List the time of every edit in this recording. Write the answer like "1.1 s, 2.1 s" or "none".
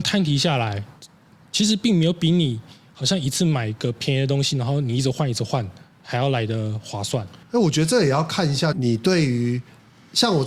7.4 s, 8.7 s